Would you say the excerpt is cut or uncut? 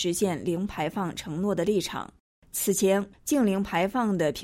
cut